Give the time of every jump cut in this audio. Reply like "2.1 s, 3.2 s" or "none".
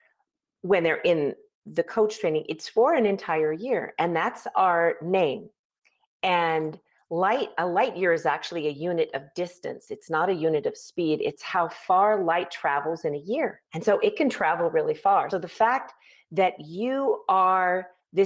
13.6 s, 15.3 s